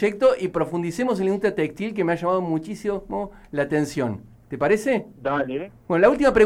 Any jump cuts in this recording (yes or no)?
no